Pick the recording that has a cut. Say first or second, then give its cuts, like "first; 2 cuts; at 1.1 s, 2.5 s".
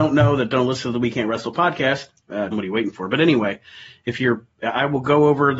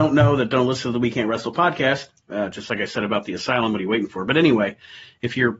first; 1 cut; at 2.5 s